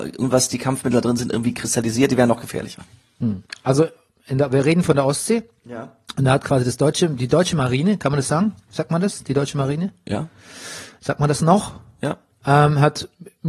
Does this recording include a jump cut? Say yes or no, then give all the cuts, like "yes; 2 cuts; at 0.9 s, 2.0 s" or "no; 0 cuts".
no; 0 cuts